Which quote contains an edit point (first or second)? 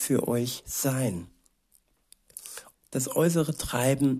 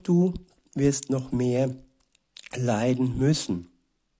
first